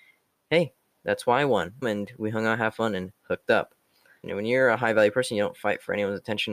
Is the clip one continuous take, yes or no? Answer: no